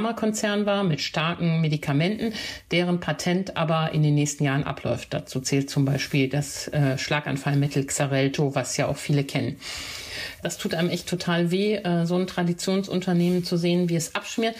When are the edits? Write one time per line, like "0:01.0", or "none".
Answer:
0:10.4